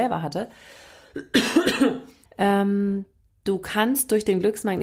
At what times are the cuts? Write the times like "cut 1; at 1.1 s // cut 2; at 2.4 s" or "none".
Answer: cut 1; at 2.3 s